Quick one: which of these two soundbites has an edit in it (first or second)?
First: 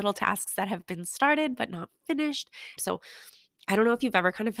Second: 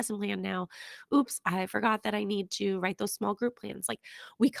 first